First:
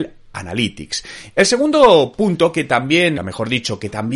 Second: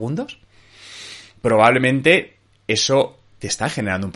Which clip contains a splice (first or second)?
first